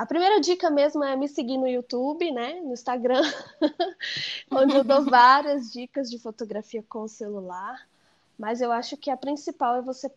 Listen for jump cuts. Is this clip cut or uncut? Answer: uncut